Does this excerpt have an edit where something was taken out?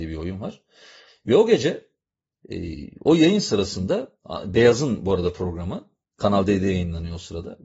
no; 0 cuts

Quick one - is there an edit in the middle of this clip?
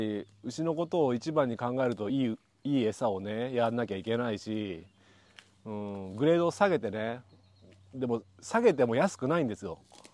no; 0 cuts

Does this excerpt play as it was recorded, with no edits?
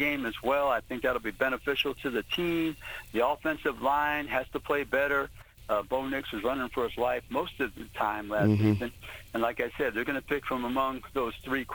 yes; 0 cuts

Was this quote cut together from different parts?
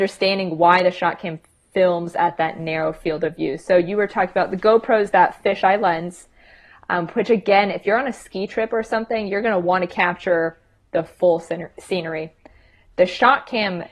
no; 0 cuts

